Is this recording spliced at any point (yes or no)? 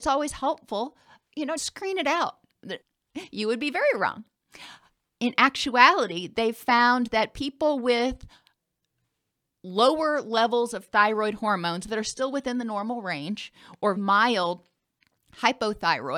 yes